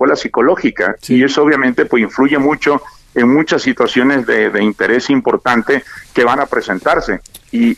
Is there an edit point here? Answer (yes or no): no